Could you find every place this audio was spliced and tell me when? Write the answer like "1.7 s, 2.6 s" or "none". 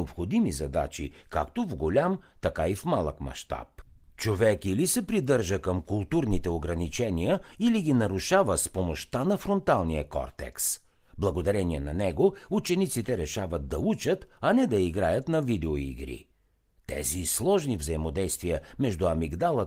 none